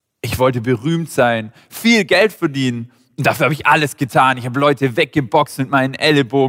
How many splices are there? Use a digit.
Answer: 0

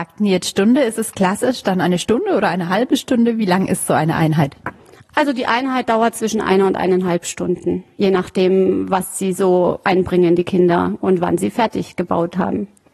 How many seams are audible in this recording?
0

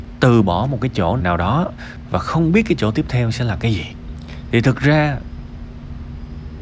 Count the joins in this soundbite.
1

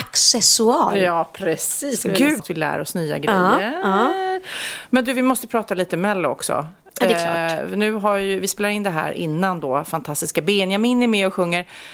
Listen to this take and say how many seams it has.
1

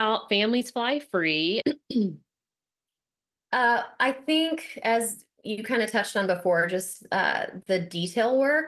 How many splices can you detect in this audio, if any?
1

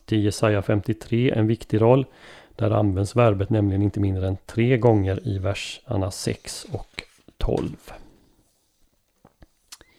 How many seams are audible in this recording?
0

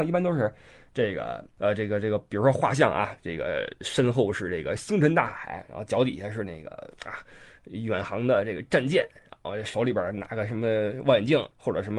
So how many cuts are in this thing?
0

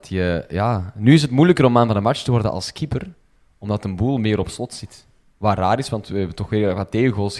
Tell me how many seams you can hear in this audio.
0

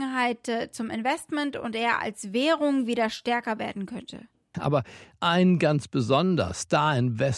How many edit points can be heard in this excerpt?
1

